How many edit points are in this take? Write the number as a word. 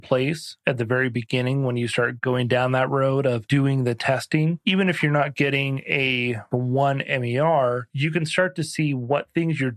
zero